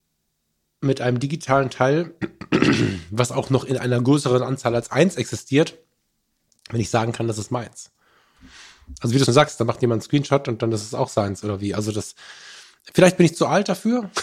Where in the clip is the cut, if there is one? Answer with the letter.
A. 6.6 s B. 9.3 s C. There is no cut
B